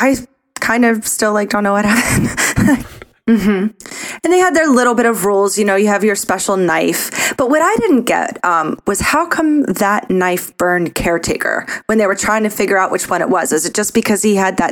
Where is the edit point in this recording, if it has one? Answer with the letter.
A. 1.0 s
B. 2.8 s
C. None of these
B